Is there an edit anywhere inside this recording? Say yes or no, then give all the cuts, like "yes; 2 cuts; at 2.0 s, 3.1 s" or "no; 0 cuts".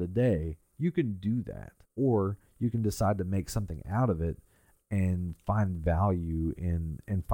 yes; 1 cut; at 1.8 s